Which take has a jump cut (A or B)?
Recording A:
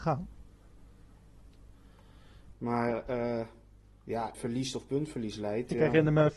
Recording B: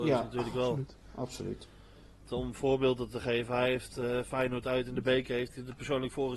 A